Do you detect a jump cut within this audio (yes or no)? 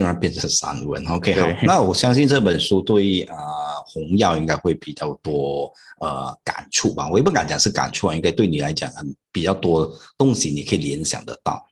no